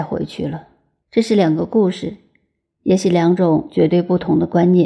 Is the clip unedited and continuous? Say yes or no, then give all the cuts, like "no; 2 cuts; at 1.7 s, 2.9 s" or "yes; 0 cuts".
no; 1 cut; at 1.0 s